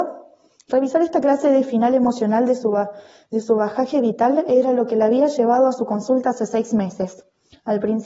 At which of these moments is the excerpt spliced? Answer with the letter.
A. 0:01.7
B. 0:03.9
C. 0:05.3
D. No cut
D